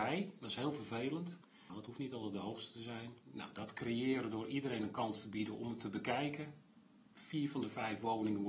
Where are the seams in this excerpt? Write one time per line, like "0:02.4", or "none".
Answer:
0:01.7
0:03.2